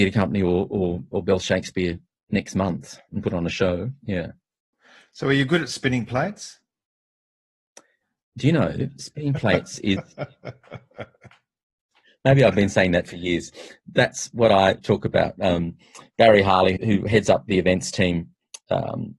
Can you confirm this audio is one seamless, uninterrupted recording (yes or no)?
no